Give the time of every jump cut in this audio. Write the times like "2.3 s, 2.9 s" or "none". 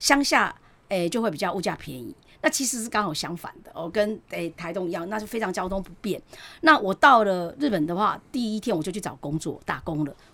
none